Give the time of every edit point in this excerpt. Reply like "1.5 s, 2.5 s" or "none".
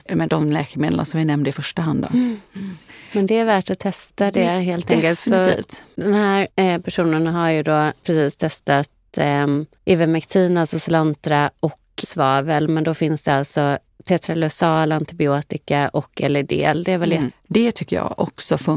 9.7 s, 12.0 s, 17.3 s